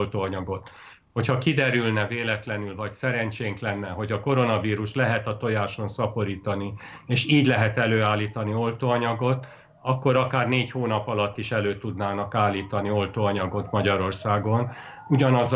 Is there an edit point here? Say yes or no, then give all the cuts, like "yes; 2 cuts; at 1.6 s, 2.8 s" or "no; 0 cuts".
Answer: no; 0 cuts